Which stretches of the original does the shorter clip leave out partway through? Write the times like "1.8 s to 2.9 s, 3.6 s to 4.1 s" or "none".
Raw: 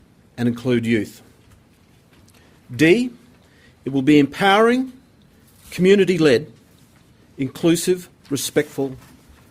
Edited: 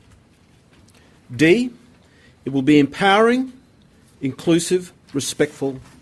5.5 s to 7.3 s